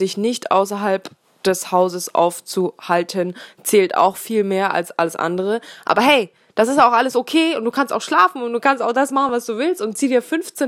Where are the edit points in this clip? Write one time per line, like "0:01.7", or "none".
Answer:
none